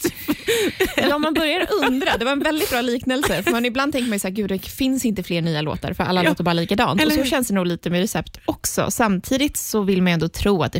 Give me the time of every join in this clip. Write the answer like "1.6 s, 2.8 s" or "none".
none